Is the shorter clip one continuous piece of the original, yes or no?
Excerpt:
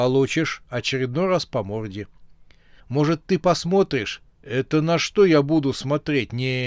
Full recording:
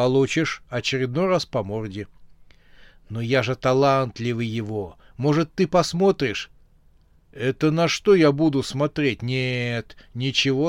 no